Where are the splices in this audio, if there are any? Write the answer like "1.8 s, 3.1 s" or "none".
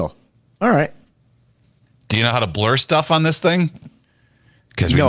none

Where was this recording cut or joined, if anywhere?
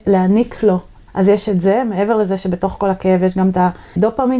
1.1 s

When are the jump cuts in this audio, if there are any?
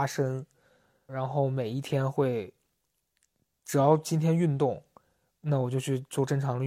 1.1 s

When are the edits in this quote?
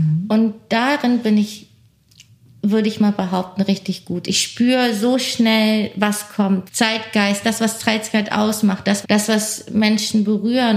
6.7 s, 9.0 s

